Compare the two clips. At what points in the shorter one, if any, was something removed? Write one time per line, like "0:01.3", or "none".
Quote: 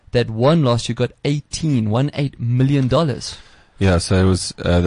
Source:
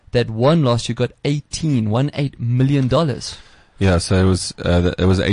none